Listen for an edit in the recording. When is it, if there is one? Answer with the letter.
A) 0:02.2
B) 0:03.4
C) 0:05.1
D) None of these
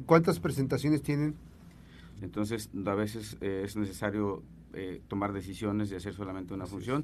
A